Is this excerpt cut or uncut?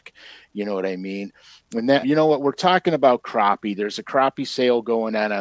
cut